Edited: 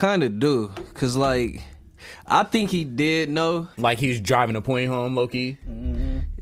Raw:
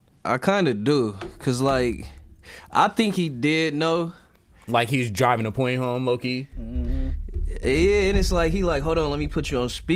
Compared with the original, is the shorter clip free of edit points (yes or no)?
no